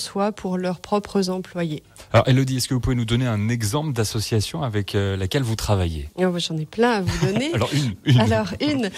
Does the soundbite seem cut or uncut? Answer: uncut